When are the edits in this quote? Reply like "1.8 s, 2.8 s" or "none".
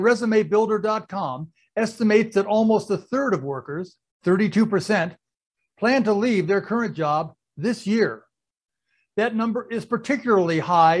none